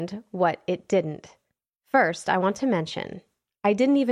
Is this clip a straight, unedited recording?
yes; 0 cuts

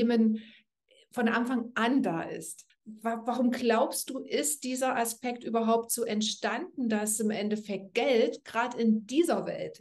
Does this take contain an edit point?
yes; 1 cut; at 2.7 s

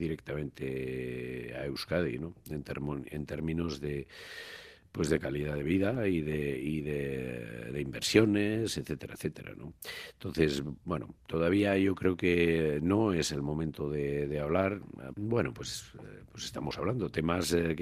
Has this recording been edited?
yes; 1 cut; at 15.1 s

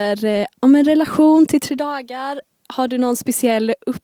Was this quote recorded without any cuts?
yes; 0 cuts

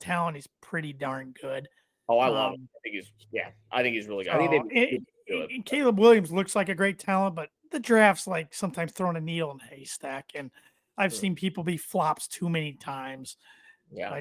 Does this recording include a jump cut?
no; 0 cuts

